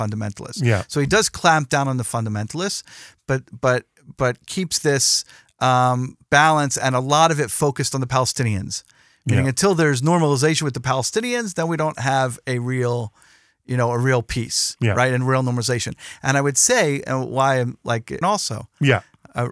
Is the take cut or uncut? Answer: cut